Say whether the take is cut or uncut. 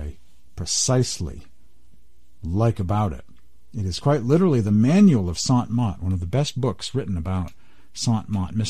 uncut